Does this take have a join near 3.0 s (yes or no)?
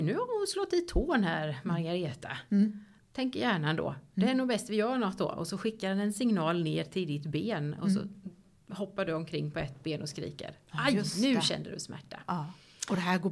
yes